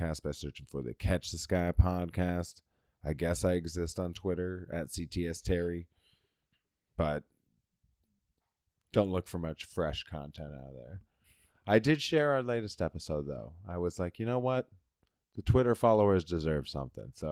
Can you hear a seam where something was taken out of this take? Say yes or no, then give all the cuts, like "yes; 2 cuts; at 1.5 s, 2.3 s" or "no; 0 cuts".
no; 0 cuts